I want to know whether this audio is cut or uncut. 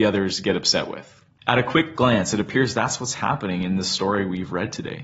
uncut